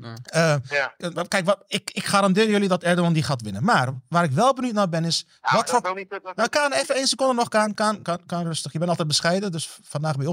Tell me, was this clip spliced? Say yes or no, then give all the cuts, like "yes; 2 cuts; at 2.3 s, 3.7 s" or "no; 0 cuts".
no; 0 cuts